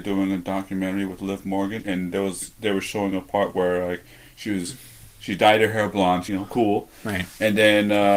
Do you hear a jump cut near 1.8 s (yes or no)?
yes